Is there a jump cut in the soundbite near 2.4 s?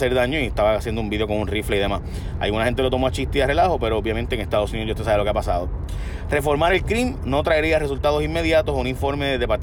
no; 0 cuts

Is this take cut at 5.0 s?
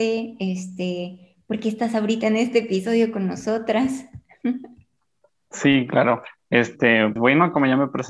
no; 1 cut; at 7.2 s

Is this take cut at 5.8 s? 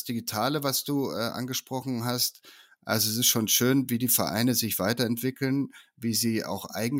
no; 0 cuts

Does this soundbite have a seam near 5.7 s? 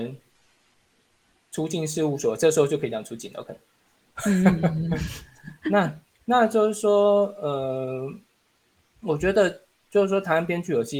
no; 0 cuts

